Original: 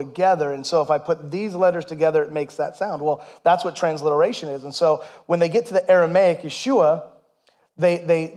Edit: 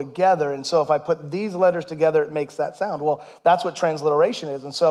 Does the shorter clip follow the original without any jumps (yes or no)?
yes